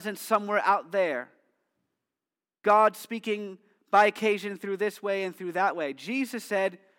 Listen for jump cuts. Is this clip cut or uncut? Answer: uncut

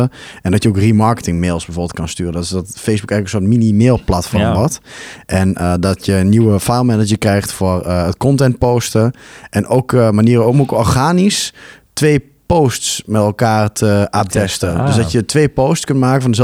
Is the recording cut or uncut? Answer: cut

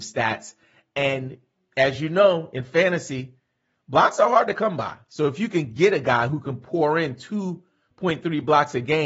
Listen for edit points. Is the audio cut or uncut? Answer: uncut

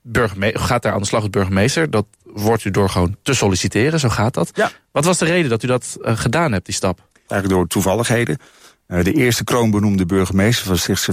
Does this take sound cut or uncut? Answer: cut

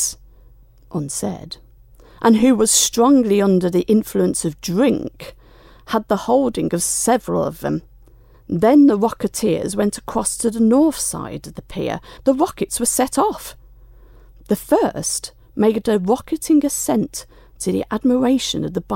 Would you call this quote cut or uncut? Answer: cut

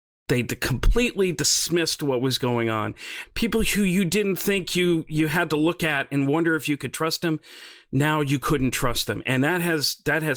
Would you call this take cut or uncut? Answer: cut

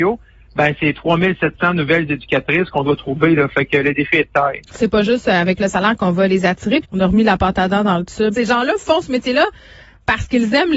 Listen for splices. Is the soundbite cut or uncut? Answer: cut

